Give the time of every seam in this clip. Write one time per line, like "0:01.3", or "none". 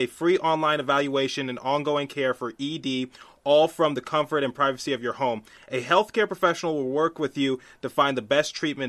none